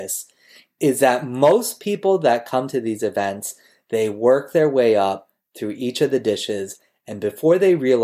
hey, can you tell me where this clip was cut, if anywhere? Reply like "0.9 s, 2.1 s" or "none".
none